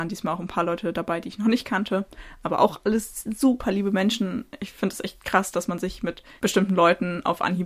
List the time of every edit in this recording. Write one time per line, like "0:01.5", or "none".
none